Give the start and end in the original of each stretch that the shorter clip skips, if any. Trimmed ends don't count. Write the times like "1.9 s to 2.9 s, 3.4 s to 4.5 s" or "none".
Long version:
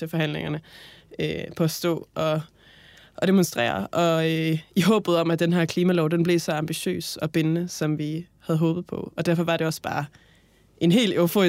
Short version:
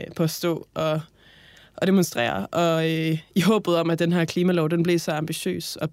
none